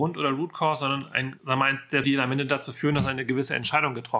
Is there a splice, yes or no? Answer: yes